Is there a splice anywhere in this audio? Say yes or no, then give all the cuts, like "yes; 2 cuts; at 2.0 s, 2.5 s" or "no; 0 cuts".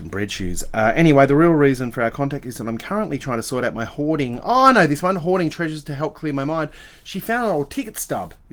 no; 0 cuts